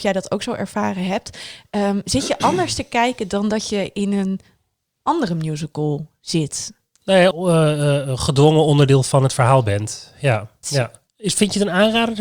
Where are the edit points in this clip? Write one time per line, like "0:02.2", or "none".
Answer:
0:07.3
0:10.6